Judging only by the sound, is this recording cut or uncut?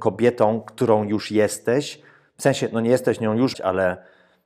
cut